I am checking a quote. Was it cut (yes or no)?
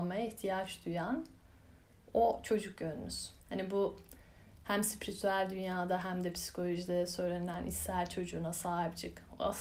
yes